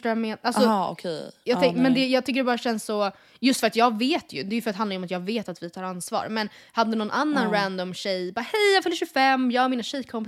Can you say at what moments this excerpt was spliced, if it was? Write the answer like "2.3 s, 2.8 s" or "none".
none

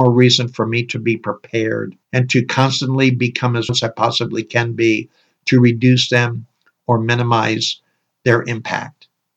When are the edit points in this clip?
2.0 s, 3.7 s

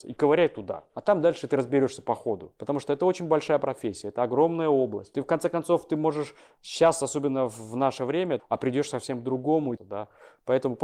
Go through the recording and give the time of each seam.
8.4 s, 9.8 s

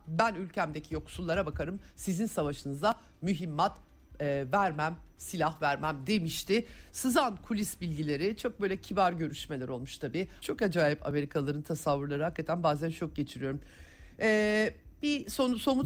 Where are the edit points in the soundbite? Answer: 10.4 s

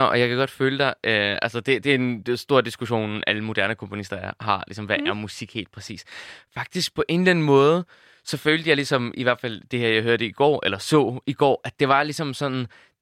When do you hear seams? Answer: none

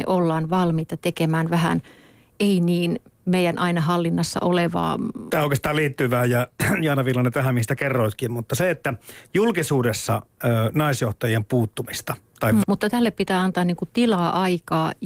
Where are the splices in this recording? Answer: 5.3 s, 12.6 s

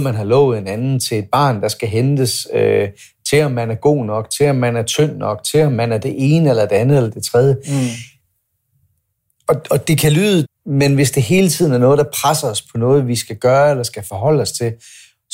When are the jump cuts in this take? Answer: 10.4 s

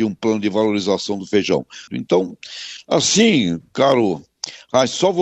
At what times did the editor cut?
1.9 s

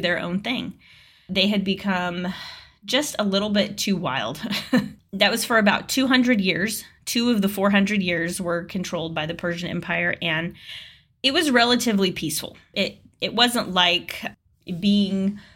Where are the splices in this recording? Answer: 5.0 s, 12.7 s

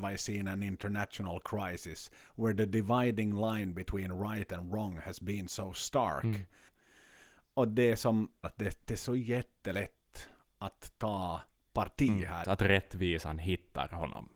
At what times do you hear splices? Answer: 6.7 s, 8.4 s, 12.4 s

